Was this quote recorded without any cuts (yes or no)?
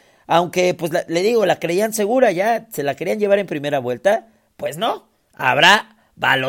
yes